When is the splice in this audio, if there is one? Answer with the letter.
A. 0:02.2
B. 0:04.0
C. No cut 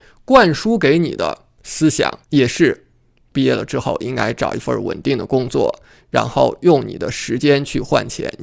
A